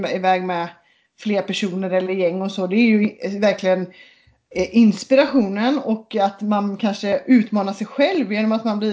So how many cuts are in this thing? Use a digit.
0